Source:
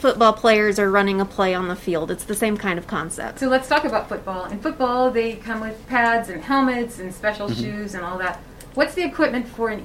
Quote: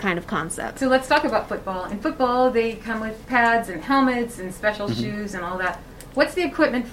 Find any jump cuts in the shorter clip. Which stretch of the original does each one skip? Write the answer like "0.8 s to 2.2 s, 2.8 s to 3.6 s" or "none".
none

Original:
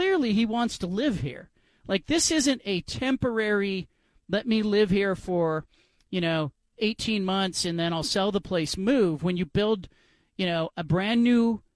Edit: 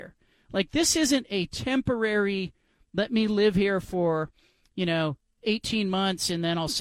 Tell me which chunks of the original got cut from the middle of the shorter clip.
none

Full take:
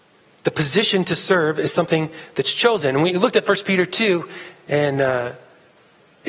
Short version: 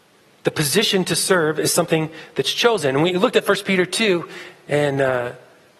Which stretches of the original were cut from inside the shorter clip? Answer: none

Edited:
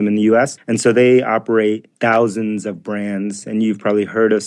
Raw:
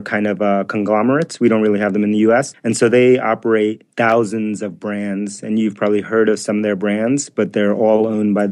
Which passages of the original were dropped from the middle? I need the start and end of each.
none

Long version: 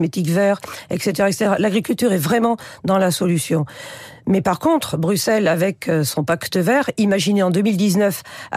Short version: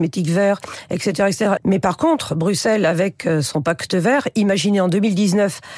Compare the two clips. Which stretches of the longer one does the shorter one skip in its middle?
1.6 s to 4.2 s

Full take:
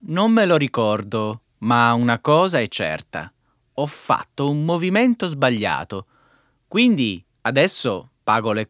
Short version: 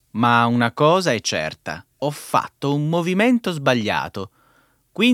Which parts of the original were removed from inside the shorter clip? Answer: 3.4 s to 3.7 s

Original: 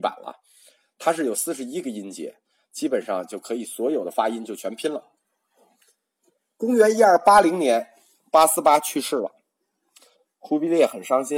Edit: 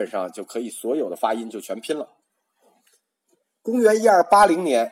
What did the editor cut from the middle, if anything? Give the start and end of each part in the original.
none

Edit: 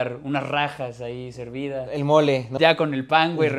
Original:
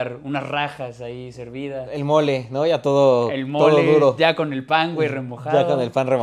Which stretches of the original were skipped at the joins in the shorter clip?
2.6 s to 4.2 s

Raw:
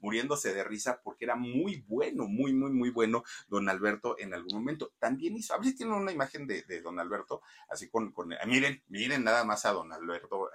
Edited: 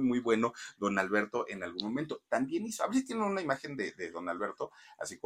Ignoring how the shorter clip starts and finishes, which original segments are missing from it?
none

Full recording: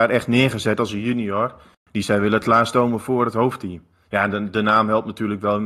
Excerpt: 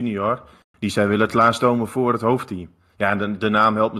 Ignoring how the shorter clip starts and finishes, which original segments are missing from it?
none

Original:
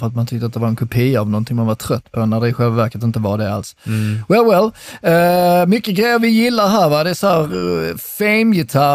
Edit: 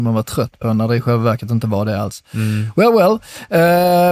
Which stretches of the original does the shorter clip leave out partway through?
none

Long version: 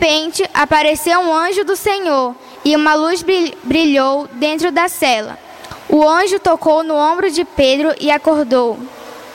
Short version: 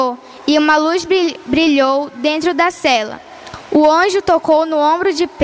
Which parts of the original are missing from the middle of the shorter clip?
none

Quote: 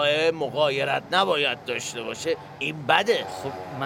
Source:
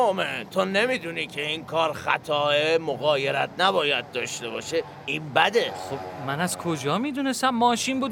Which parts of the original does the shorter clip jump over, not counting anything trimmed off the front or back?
none

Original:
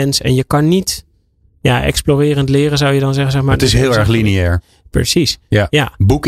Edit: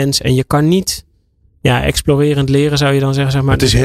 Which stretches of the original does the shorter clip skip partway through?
none

